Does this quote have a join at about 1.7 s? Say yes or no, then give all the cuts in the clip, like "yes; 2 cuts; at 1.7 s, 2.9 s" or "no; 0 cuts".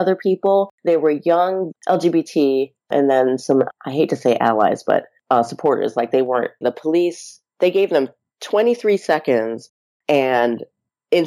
yes; 2 cuts; at 1.7 s, 6.6 s